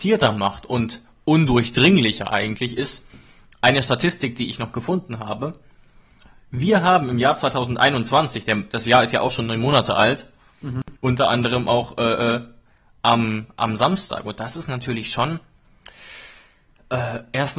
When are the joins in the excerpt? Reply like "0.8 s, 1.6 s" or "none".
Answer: 11.0 s